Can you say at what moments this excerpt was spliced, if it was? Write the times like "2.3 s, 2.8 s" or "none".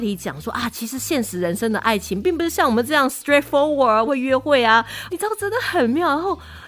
4.1 s, 5.1 s